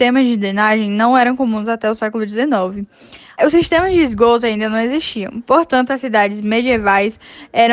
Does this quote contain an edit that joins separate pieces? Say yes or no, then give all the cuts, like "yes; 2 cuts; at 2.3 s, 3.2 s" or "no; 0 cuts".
yes; 1 cut; at 3.4 s